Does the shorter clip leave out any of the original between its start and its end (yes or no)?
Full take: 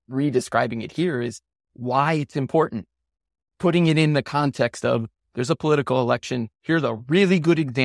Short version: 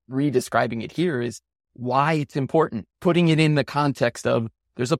yes